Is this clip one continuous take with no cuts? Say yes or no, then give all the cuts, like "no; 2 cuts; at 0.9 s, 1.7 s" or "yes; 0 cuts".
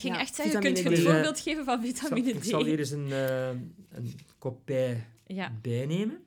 yes; 0 cuts